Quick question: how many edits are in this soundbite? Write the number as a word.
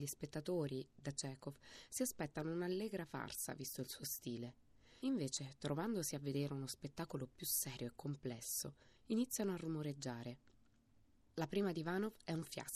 zero